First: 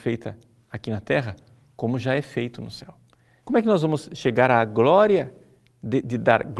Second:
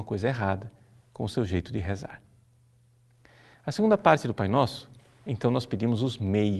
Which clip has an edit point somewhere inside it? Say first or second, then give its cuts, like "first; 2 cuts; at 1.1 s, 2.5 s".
first; 1 cut; at 3.4 s